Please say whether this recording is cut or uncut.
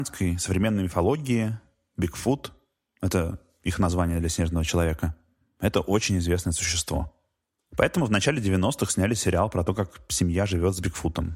uncut